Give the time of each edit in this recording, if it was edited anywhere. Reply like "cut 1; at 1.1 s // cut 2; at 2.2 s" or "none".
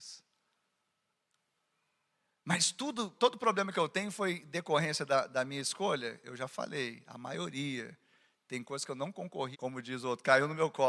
cut 1; at 3.2 s // cut 2; at 9.5 s